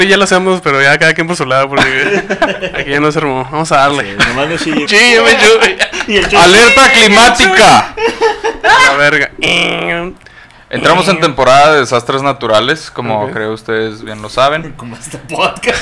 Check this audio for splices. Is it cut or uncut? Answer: cut